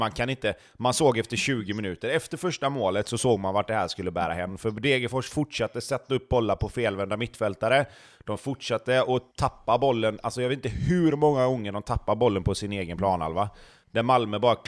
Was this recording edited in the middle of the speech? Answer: no; 0 cuts

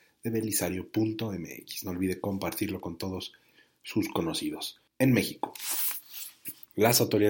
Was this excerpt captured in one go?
no; 1 cut; at 4.9 s

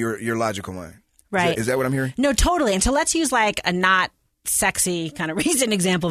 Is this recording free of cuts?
yes; 0 cuts

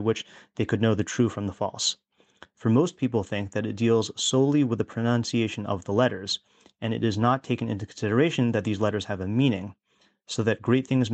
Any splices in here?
yes; 1 cut; at 2.5 s

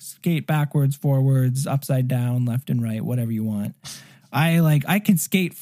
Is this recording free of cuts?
yes; 0 cuts

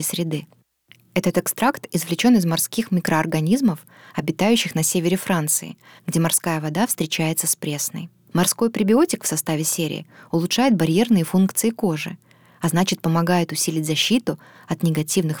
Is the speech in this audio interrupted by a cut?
yes; 2 cuts; at 6.0 s, 8.3 s

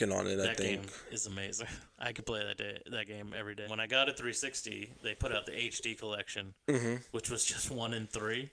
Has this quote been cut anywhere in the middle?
yes; 1 cut; at 3.6 s

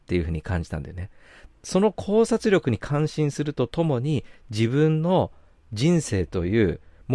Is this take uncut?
no; 1 cut; at 1.5 s

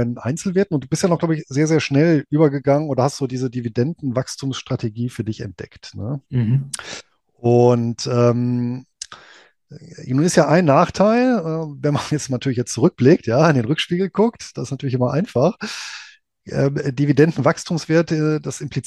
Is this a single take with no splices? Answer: yes; 0 cuts

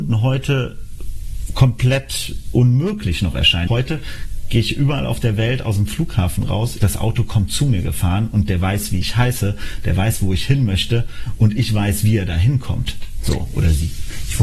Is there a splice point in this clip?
yes; 2 cuts; at 3.7 s, 6.8 s

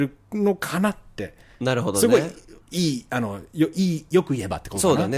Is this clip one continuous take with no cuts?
yes; 0 cuts

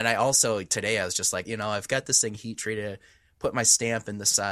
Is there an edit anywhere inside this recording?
yes; 1 cut; at 1.4 s

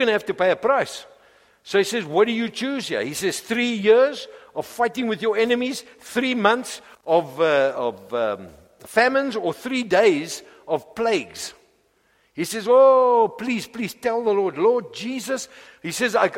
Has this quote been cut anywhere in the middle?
no; 0 cuts

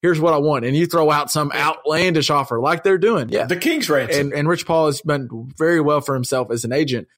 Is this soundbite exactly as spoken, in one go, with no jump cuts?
no; 1 cut; at 4.3 s

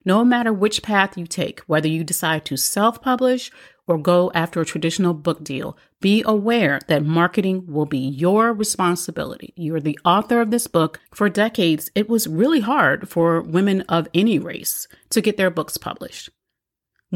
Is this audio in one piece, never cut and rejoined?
no; 2 cuts; at 11.1 s, 15.0 s

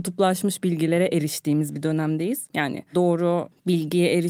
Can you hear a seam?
yes; 1 cut; at 2.5 s

